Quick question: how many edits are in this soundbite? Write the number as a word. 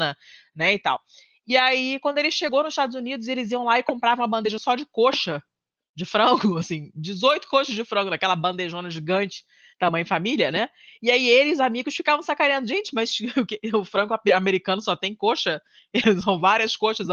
zero